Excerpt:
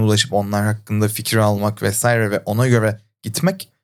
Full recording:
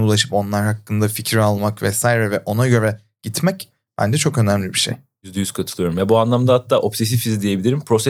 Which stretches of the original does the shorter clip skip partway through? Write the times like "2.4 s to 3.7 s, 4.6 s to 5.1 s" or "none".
none